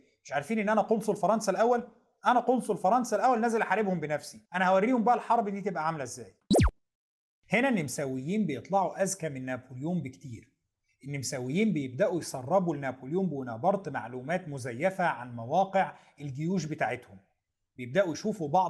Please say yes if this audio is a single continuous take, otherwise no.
no